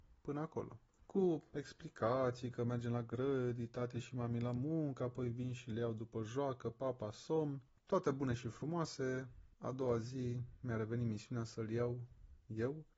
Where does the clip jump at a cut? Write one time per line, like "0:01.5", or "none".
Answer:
0:07.8
0:09.5